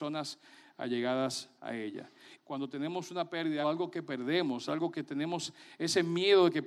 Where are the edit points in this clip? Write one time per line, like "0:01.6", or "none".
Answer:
0:02.4
0:03.6